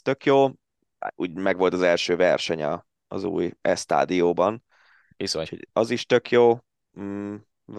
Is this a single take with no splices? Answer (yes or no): yes